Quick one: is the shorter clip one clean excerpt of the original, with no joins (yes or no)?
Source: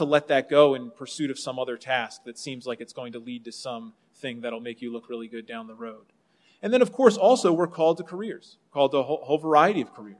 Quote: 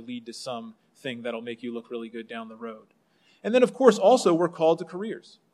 yes